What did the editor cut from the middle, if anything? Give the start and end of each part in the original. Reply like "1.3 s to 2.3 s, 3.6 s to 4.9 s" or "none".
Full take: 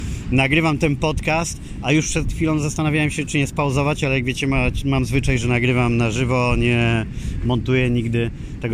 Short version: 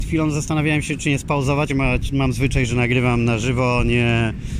4.0 s to 4.4 s